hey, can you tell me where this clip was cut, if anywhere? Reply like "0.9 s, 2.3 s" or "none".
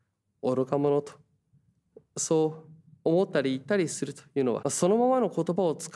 4.6 s